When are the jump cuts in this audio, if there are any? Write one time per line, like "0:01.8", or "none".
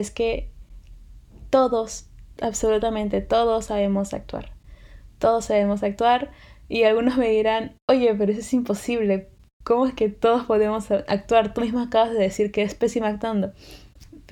none